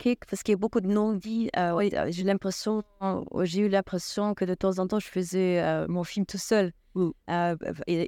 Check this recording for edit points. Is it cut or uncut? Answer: uncut